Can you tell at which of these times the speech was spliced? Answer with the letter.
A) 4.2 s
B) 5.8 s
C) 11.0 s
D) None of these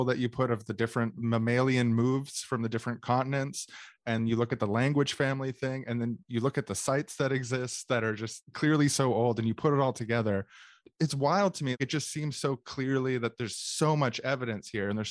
A